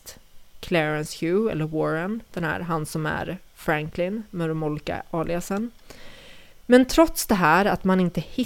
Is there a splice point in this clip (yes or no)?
yes